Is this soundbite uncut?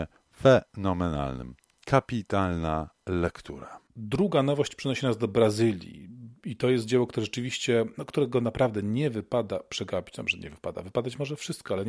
yes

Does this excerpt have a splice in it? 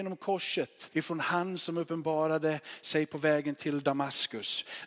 yes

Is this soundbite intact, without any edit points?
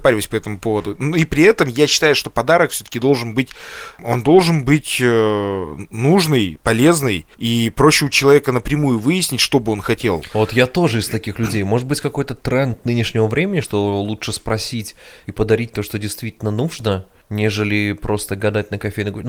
yes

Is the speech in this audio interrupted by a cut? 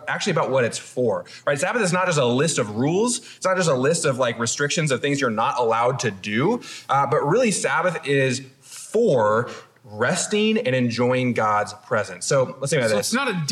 no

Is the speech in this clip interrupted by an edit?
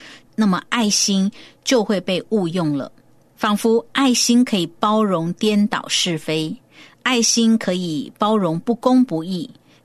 no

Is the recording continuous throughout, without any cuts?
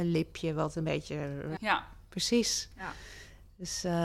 no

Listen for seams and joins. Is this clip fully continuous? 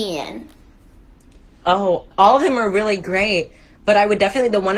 no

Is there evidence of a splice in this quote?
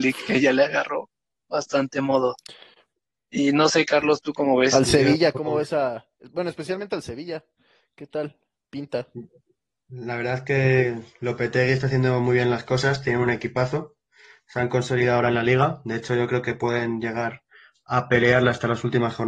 no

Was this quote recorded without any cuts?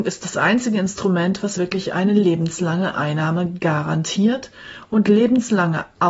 yes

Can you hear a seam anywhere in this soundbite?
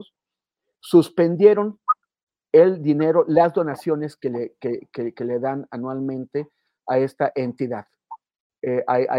no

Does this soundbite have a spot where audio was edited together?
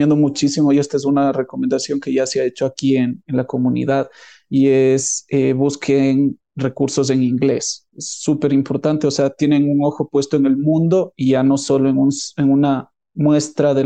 no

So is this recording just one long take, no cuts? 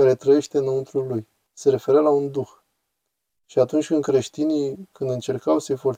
no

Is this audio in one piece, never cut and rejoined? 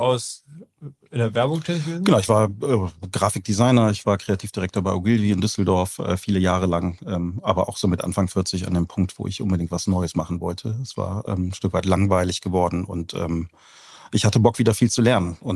yes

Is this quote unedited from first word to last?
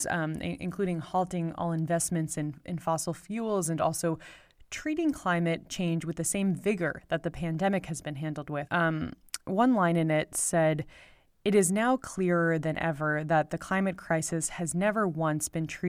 no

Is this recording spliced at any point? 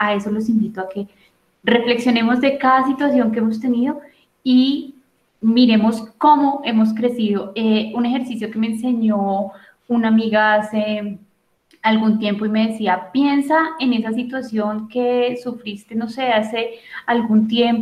no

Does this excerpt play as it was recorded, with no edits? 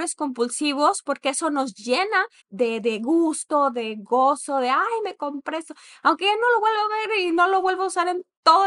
no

